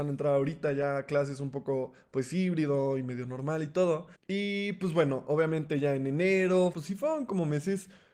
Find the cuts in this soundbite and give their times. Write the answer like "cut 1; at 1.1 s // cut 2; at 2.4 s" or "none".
cut 1; at 4.2 s // cut 2; at 6.7 s